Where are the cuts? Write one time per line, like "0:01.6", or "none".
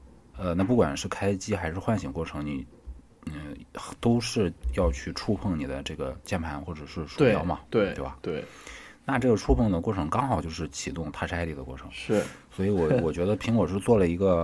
none